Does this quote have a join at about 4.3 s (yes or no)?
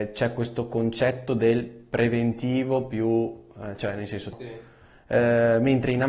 yes